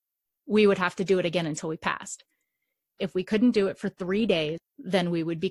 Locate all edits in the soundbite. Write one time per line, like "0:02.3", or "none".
0:04.6